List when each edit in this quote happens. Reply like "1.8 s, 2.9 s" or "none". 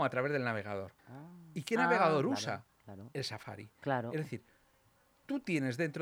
1.0 s